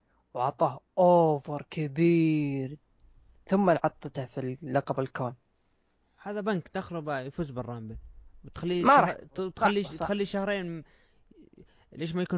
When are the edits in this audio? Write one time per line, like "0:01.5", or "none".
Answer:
none